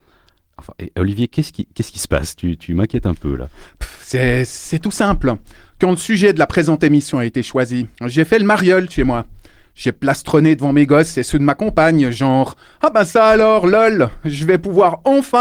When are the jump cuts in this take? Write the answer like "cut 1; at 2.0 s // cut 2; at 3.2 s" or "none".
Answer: cut 1; at 7.9 s